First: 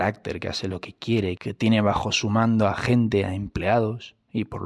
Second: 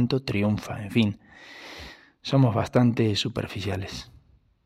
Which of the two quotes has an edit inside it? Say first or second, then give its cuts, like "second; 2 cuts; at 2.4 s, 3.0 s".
first; 1 cut; at 1.4 s